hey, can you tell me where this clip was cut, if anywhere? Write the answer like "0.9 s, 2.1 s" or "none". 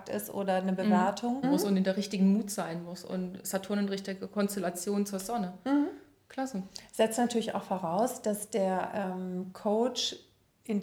1.4 s